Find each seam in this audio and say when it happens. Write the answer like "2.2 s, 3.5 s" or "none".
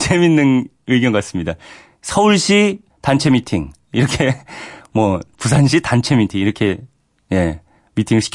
none